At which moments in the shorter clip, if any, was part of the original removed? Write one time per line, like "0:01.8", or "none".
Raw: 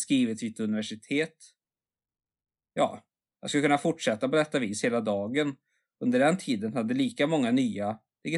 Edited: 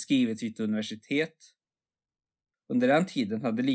0:02.5